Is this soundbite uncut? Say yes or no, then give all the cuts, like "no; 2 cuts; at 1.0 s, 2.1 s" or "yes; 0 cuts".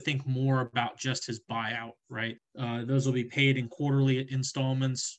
no; 1 cut; at 2.4 s